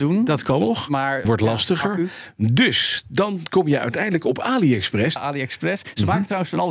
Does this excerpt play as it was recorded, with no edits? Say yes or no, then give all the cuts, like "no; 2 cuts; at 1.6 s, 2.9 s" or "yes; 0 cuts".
no; 2 cuts; at 1.2 s, 5.2 s